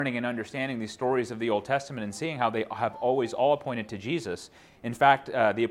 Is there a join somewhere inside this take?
no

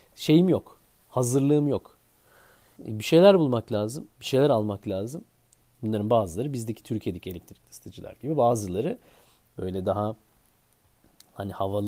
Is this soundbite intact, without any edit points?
no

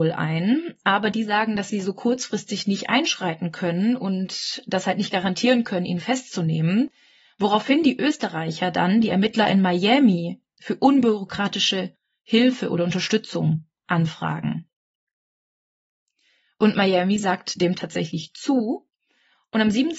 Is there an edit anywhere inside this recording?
no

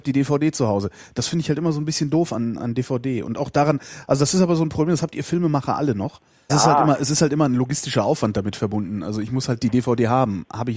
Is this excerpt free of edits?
no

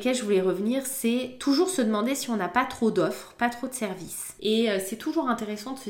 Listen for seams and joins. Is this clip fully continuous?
no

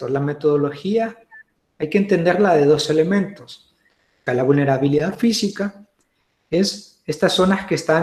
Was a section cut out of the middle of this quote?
yes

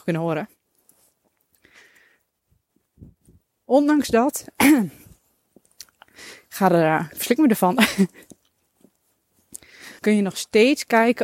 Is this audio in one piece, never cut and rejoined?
no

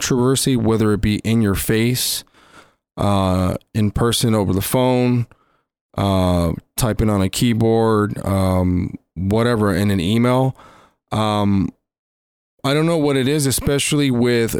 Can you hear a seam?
no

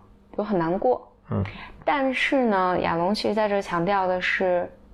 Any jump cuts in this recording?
no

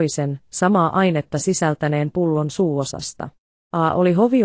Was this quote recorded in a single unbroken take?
no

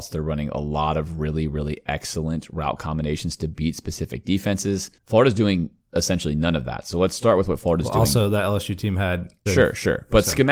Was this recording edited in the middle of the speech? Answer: yes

